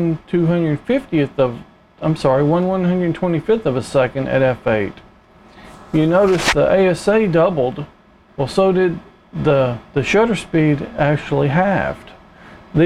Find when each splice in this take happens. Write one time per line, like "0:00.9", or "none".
none